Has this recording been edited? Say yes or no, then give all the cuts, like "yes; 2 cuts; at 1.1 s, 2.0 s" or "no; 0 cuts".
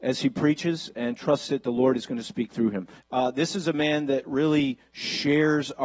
yes; 1 cut; at 3.0 s